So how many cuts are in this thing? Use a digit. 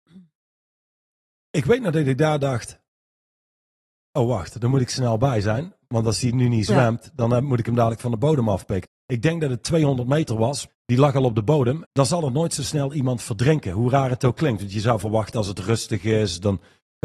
3